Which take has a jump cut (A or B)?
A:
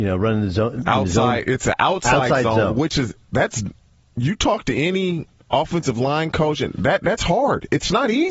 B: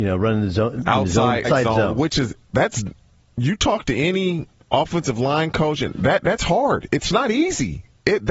B